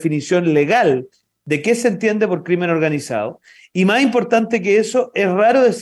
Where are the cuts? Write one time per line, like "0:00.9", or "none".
none